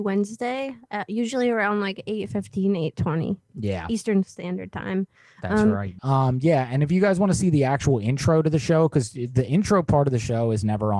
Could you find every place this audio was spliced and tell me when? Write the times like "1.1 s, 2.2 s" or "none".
6.0 s